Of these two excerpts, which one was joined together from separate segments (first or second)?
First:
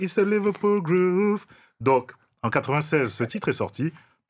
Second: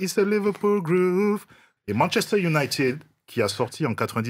second